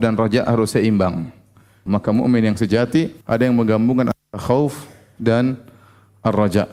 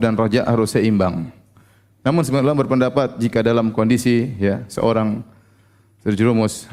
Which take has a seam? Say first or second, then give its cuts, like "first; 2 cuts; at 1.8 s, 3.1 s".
first; 2 cuts; at 1.9 s, 3.2 s